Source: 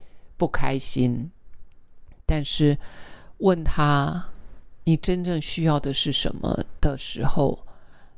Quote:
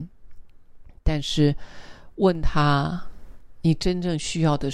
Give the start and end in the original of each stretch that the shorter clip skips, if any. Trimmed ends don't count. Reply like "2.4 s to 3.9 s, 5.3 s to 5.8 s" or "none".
none